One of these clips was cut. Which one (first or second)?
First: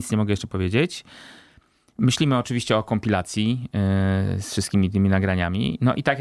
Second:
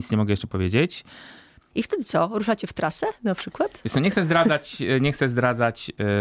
second